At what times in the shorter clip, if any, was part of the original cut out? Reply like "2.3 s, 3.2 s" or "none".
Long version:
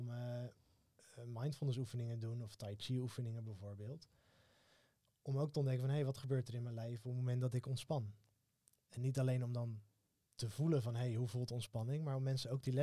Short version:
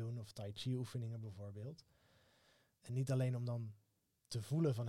2.8 s